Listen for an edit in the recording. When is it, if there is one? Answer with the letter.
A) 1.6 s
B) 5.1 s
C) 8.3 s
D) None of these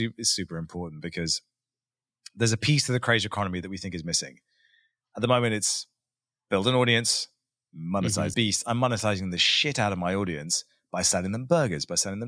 C